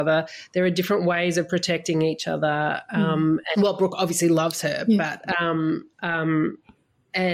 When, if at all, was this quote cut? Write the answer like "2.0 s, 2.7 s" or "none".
3.5 s, 5.9 s